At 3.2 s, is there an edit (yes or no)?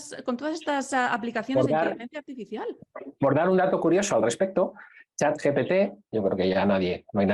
no